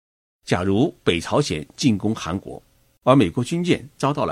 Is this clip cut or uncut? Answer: cut